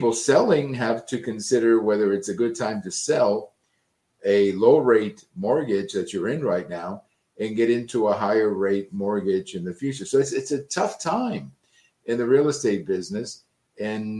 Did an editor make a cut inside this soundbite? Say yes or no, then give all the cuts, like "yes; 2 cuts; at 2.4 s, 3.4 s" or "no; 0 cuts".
no; 0 cuts